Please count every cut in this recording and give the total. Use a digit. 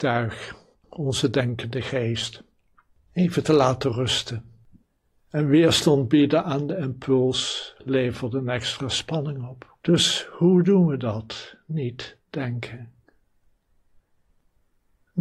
2